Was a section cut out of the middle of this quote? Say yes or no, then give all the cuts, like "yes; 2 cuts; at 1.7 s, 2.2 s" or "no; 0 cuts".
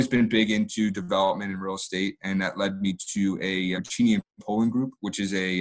yes; 1 cut; at 3.7 s